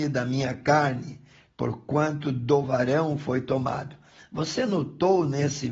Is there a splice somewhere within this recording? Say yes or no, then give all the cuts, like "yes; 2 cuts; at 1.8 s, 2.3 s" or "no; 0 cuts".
yes; 2 cuts; at 1.5 s, 4.2 s